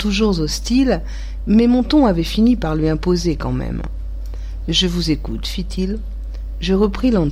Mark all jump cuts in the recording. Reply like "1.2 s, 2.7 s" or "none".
none